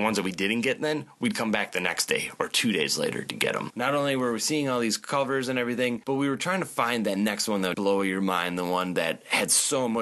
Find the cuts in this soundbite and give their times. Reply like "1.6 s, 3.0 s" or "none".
3.7 s, 7.7 s